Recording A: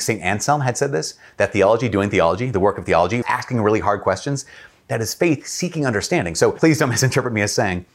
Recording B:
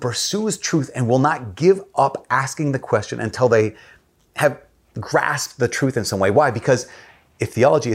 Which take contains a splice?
A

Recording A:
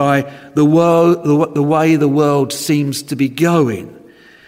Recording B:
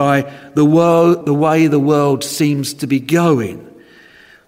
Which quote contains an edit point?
B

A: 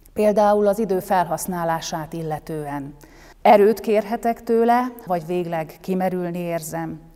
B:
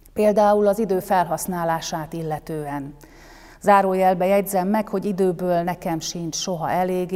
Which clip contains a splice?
A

